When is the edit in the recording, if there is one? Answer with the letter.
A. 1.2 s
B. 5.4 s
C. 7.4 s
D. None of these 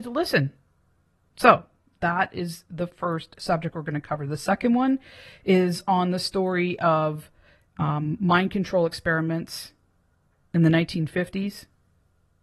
D